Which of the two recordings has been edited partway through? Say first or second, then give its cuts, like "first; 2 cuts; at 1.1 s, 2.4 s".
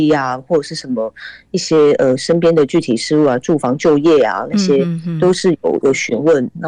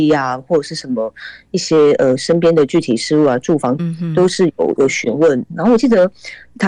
second; 1 cut; at 3.8 s